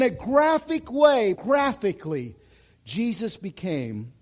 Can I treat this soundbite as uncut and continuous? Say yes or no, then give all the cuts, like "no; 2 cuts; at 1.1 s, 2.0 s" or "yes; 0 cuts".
no; 1 cut; at 1.4 s